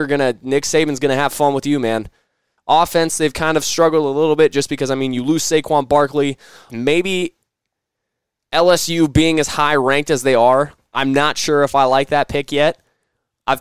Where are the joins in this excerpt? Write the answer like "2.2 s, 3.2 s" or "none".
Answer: 2.6 s, 6.7 s